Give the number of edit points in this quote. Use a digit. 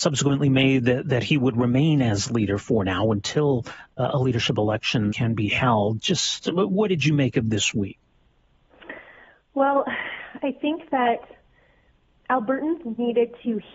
1